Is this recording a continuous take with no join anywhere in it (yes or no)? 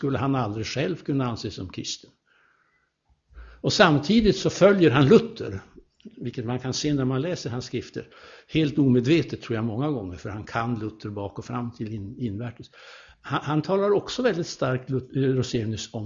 yes